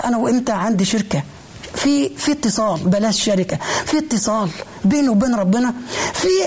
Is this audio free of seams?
yes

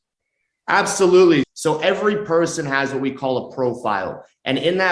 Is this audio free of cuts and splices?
no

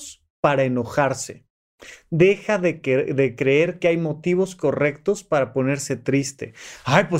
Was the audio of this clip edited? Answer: no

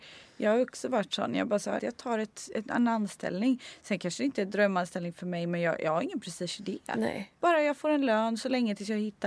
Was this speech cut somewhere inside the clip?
yes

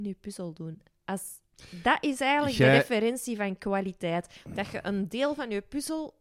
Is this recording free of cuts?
yes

